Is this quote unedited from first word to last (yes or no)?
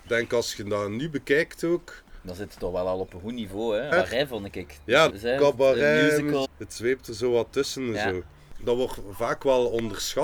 no